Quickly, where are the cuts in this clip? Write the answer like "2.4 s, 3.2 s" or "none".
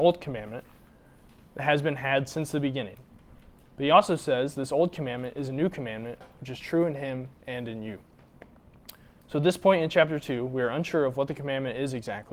none